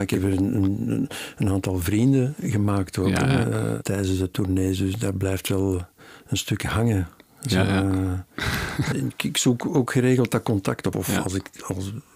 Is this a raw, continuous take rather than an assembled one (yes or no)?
no